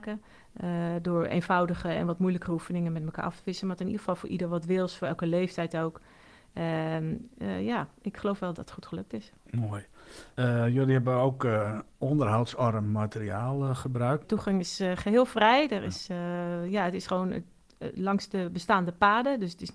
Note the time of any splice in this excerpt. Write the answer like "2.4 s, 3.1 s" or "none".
8.5 s, 14.2 s